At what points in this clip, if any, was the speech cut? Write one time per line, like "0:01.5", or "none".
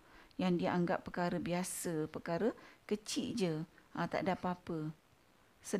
none